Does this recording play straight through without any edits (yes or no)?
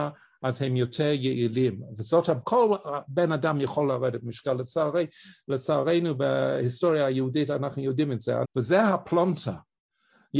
no